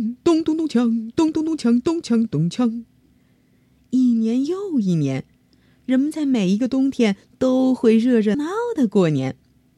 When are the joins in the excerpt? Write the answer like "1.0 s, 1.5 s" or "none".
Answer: 8.3 s